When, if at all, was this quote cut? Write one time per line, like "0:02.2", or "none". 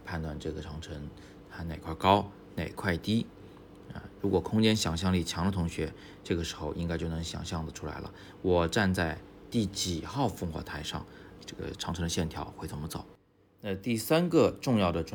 0:11.4